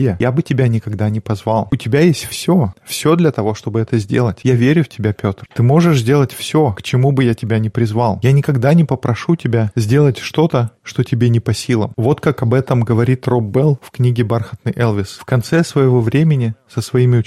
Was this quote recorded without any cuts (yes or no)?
yes